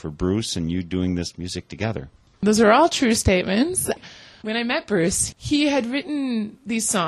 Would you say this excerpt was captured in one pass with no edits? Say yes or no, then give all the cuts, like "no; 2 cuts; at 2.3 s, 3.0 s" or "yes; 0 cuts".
no; 1 cut; at 4.4 s